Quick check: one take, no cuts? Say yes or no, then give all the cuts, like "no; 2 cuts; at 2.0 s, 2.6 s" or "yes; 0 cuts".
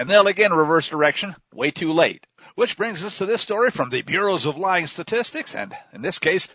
yes; 0 cuts